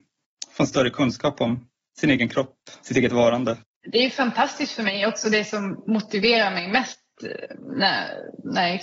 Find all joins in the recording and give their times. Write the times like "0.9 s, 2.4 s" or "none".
none